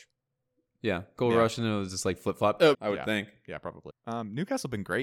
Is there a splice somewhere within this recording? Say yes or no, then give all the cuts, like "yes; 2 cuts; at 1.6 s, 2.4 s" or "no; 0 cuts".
yes; 2 cuts; at 2.7 s, 3.9 s